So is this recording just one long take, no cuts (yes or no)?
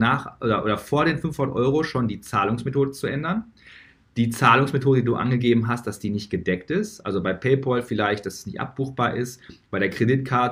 yes